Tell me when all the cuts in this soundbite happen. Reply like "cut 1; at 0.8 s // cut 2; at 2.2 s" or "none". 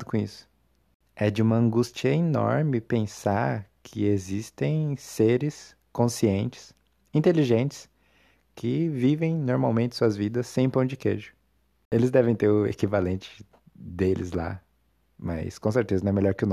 none